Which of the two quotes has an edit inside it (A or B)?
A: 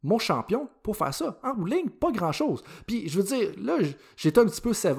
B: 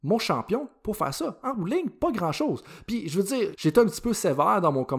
B